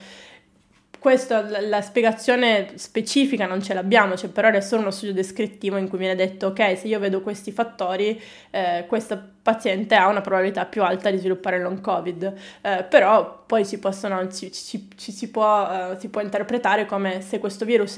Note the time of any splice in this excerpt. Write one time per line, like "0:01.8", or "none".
none